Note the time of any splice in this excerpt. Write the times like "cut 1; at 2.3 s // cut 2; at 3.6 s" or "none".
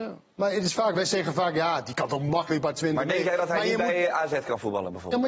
none